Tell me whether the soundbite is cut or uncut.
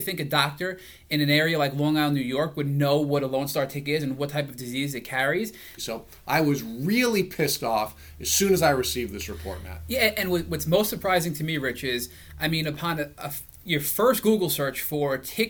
cut